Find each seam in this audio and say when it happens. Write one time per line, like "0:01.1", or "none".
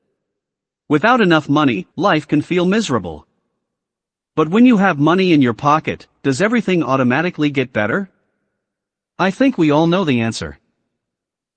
0:01.9